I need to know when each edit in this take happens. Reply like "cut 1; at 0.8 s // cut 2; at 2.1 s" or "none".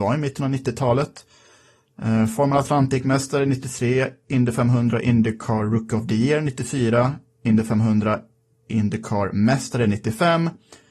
none